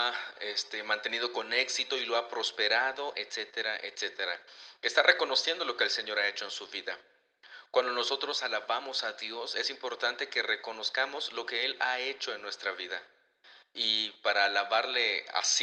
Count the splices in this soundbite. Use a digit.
1